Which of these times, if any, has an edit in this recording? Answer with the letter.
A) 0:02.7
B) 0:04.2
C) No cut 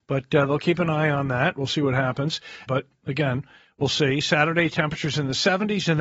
A